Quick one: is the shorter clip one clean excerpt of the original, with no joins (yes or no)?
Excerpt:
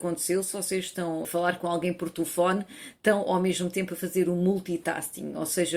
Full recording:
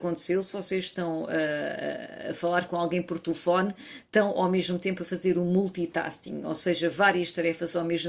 no